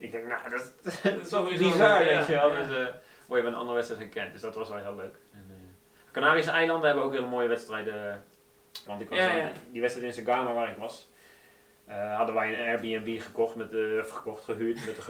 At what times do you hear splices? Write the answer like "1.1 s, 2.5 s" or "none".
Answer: 8.9 s